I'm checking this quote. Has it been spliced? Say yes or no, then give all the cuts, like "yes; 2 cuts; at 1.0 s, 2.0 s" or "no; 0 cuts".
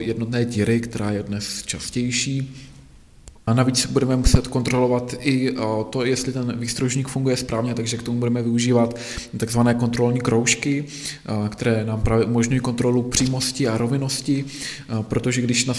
yes; 1 cut; at 3.5 s